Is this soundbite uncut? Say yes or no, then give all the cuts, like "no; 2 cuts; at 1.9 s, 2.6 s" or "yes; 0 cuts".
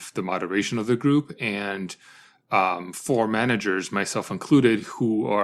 yes; 0 cuts